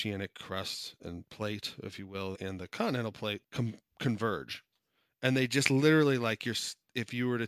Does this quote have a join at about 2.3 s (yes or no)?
yes